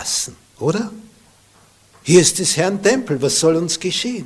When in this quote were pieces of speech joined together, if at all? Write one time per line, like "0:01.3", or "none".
0:02.0